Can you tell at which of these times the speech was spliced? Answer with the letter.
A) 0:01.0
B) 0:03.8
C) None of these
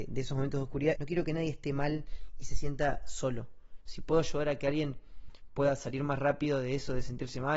A